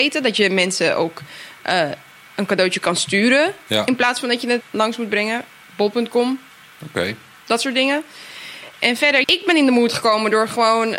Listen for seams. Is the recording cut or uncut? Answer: cut